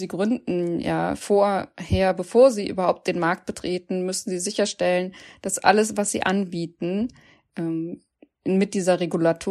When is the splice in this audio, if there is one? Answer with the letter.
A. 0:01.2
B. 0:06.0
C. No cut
C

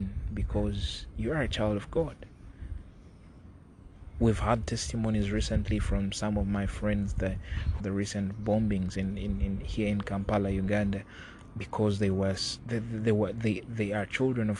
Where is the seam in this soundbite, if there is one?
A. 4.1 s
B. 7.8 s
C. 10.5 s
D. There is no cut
B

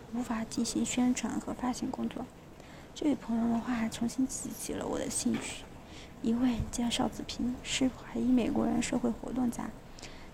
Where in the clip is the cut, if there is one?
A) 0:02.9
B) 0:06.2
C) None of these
B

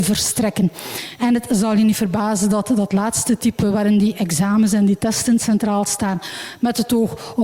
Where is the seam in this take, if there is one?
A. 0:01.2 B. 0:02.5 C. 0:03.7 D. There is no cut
A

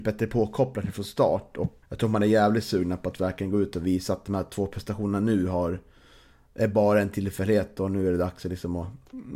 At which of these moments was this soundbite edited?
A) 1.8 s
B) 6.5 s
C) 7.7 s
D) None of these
A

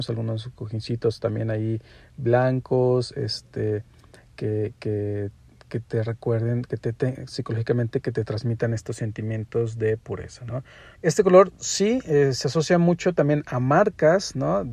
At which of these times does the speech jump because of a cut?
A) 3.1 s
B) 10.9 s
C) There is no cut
B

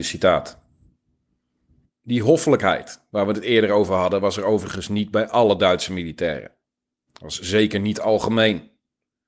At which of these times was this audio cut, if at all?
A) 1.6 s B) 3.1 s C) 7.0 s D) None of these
D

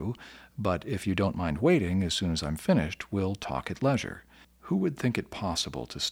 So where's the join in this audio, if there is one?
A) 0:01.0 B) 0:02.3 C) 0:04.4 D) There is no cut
C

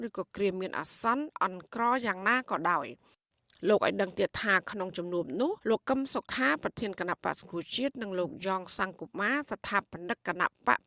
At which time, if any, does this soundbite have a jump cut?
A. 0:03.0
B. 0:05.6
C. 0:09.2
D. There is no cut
B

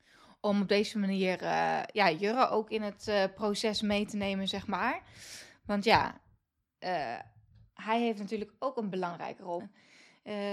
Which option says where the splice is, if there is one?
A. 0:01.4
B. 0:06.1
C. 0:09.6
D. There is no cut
C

